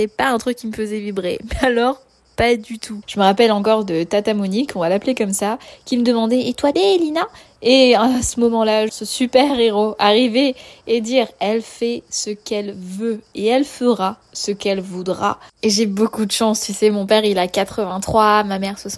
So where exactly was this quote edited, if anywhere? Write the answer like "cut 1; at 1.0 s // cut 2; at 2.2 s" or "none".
cut 1; at 3.0 s // cut 2; at 6.7 s // cut 3; at 8.9 s